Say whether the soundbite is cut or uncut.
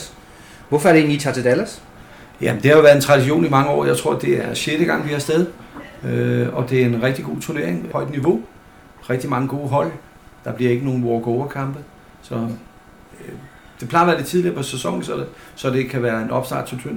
cut